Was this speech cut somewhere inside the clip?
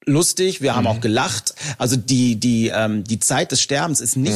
no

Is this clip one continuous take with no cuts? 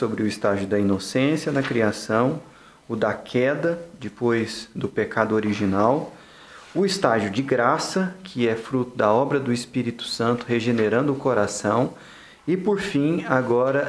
yes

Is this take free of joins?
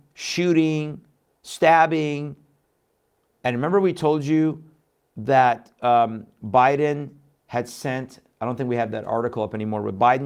no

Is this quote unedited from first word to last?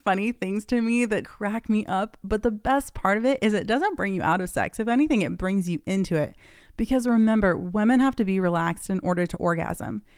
no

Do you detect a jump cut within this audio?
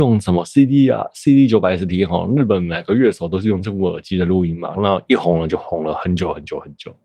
yes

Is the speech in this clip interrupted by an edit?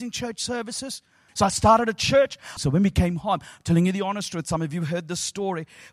yes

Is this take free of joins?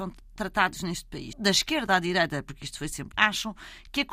no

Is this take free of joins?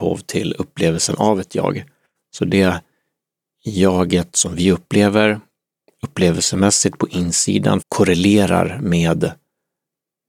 no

